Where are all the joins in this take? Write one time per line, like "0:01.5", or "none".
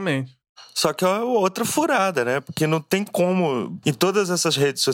0:03.8